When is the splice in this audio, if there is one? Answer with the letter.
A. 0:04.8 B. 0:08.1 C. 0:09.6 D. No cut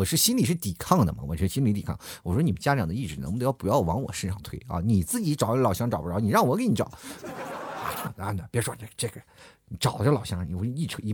B